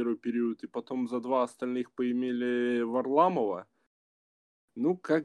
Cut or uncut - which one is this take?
uncut